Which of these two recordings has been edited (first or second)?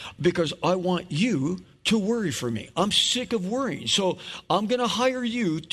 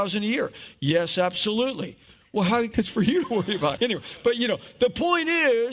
second